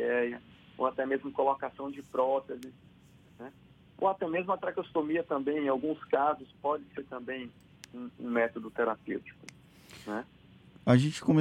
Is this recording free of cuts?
yes; 0 cuts

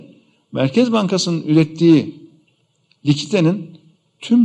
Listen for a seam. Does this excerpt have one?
no; 0 cuts

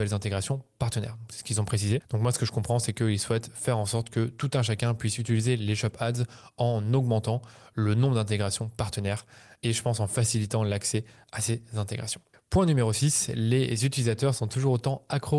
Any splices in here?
no; 0 cuts

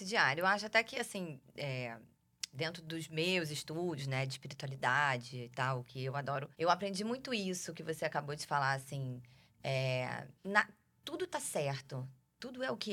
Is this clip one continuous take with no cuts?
no; 2 cuts; at 6.5 s, 10.4 s

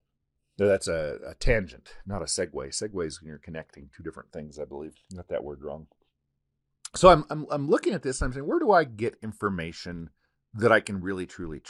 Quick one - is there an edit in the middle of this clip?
no; 0 cuts

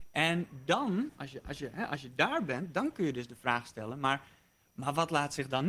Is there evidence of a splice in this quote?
no; 0 cuts

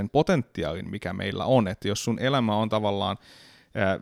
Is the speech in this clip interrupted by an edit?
no; 0 cuts

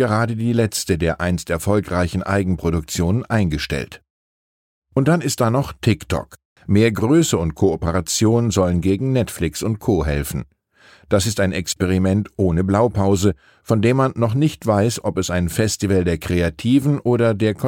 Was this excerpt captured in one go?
no; 1 cut; at 6.6 s

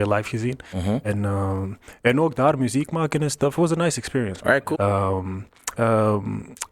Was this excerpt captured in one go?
no; 2 cuts; at 4.7 s, 5.8 s

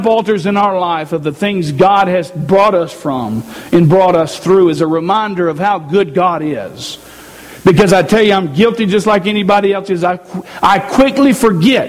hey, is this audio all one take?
yes; 0 cuts

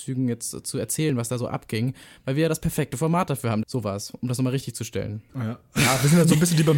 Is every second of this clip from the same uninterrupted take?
no; 2 cuts; at 3.6 s, 5.3 s

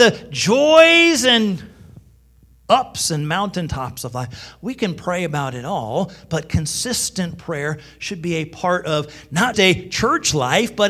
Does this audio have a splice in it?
yes; 1 cut; at 9.5 s

